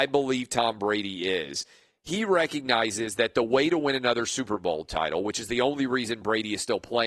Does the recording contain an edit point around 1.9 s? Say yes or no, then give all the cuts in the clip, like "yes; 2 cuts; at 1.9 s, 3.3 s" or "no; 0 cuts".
no; 0 cuts